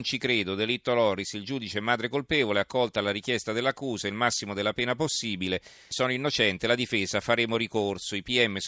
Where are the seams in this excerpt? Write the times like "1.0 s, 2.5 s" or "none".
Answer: 5.9 s